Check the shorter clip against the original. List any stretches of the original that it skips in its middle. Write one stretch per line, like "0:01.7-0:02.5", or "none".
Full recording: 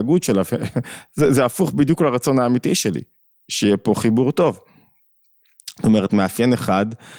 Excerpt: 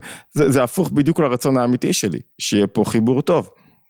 0:03.1-0:03.4